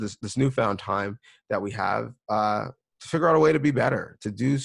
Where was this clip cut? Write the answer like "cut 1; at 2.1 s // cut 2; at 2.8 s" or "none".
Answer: none